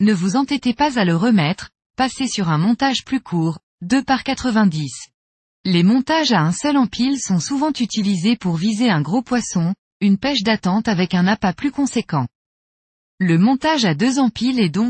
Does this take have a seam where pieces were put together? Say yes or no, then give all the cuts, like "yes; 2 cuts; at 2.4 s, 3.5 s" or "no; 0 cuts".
yes; 1 cut; at 5.6 s